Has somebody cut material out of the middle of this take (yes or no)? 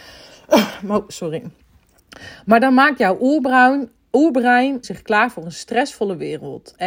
yes